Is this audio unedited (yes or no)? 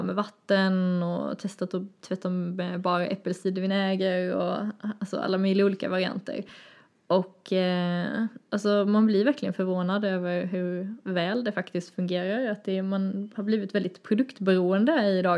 yes